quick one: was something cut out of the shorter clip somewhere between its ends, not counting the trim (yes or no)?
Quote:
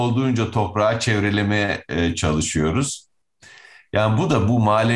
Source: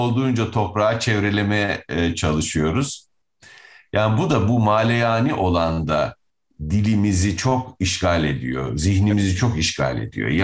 no